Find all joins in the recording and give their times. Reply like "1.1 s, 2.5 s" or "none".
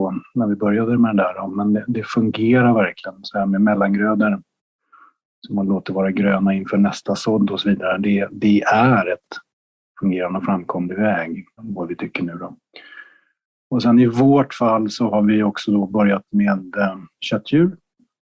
11.6 s